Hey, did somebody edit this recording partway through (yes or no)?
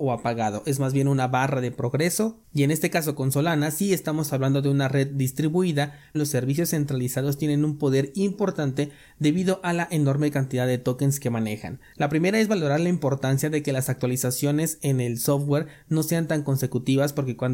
yes